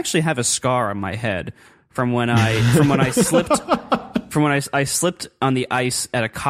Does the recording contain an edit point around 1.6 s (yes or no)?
no